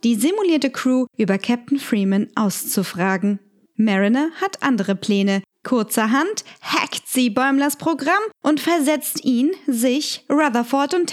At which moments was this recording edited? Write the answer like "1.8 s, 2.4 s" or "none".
5.5 s